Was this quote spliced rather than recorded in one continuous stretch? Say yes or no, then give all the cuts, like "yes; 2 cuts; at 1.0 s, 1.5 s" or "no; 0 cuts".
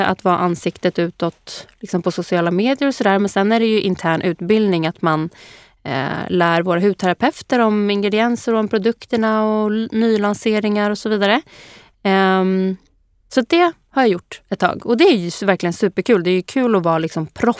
no; 0 cuts